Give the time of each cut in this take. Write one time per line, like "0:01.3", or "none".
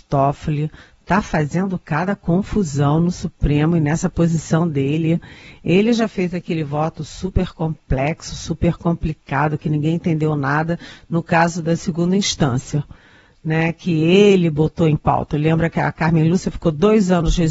none